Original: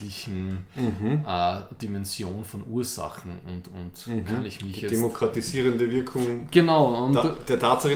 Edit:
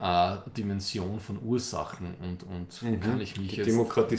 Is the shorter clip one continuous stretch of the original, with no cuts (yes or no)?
yes